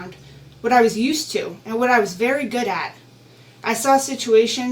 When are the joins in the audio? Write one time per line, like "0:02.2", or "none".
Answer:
none